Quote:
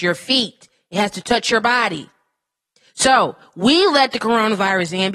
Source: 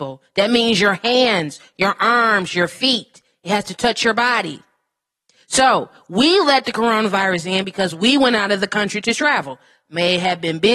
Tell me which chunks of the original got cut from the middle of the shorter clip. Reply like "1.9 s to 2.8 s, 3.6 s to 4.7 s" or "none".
none